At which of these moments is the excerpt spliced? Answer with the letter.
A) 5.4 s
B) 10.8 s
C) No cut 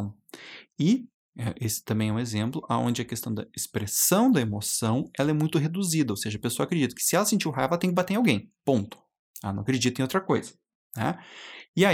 C